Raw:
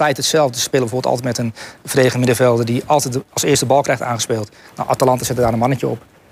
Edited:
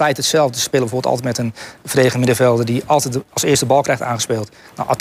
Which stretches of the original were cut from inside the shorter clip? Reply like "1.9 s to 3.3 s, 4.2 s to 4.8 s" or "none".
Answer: none